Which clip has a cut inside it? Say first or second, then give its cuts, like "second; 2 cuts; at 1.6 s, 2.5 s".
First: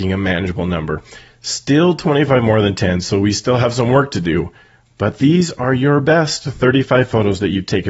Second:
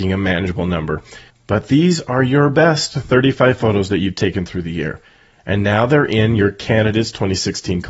second; 1 cut; at 1.3 s